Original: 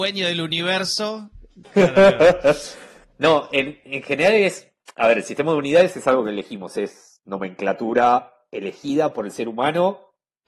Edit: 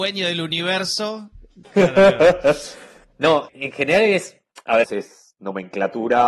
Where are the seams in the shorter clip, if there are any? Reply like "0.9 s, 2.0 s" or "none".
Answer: 3.5 s, 4.8 s